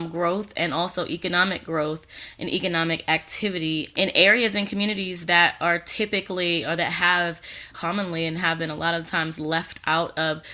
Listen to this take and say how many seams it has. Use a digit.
2